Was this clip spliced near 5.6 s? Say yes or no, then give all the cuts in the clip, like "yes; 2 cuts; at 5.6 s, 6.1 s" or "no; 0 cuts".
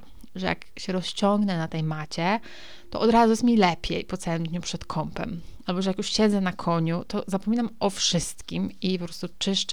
yes; 1 cut; at 5.6 s